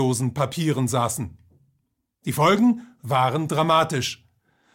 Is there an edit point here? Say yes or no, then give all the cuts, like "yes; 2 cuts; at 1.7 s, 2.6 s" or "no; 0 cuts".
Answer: no; 0 cuts